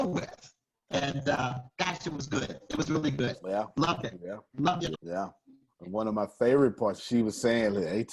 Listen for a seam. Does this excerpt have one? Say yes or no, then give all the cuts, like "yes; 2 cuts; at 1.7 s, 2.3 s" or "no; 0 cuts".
yes; 2 cuts; at 4.9 s, 7.0 s